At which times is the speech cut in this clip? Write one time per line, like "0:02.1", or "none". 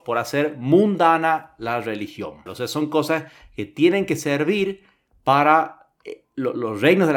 0:02.5